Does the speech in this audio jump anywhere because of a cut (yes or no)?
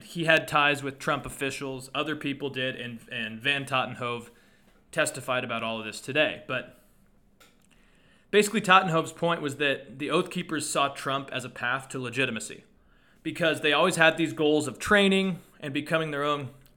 no